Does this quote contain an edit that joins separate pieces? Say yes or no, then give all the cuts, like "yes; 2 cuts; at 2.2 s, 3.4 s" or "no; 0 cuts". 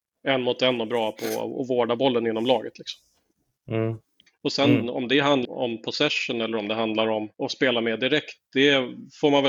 yes; 3 cuts; at 4.3 s, 5.4 s, 7.3 s